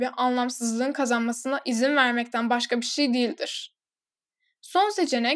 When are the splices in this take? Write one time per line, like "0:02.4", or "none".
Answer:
none